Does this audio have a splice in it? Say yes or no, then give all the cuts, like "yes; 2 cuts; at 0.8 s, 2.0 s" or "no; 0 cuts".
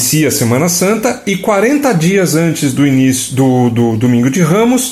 no; 0 cuts